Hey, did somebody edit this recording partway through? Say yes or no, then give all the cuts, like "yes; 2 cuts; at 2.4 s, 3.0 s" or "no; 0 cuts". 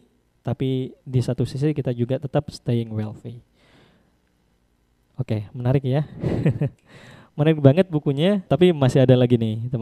yes; 1 cut; at 8.5 s